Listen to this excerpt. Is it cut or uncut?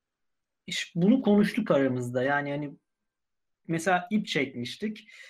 uncut